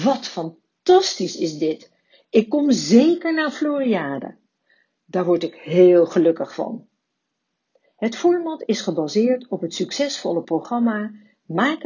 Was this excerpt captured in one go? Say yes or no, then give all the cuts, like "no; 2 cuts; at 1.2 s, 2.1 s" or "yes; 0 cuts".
no; 2 cuts; at 5.0 s, 7.9 s